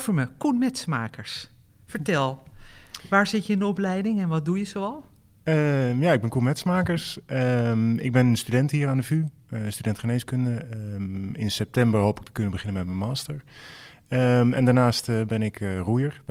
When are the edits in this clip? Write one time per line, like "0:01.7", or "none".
none